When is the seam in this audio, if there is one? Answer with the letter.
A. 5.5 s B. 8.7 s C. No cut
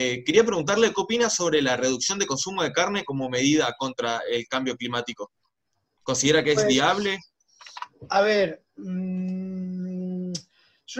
C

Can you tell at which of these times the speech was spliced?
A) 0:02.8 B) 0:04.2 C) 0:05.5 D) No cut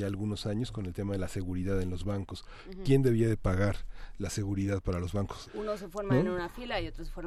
C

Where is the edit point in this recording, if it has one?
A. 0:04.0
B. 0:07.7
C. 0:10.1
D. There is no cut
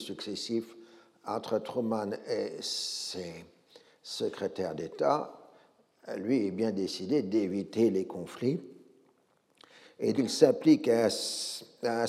C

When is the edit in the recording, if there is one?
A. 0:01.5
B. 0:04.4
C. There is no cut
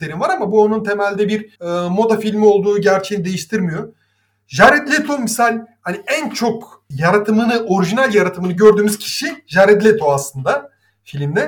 A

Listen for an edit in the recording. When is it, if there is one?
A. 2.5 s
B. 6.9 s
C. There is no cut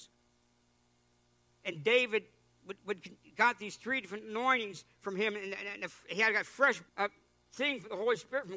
B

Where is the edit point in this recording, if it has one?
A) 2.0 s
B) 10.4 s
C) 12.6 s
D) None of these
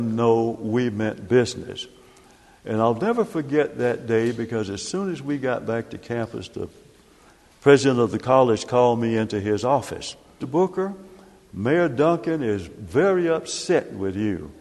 B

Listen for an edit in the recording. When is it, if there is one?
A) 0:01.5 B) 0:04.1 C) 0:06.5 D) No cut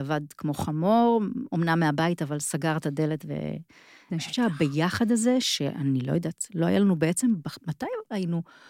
B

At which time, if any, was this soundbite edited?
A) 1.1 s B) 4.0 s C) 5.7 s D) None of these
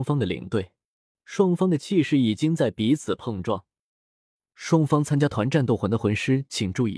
A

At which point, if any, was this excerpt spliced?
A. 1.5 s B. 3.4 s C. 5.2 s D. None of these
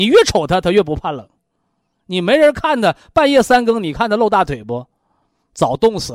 D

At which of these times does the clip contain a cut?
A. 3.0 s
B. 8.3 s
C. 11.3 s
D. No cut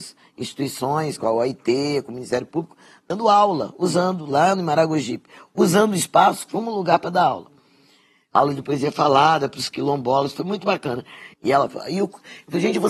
C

